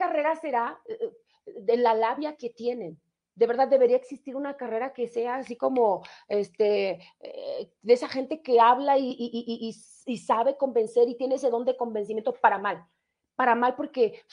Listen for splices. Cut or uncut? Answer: uncut